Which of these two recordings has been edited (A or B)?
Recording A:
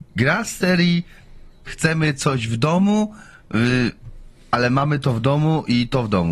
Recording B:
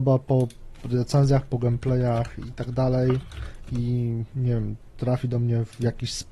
A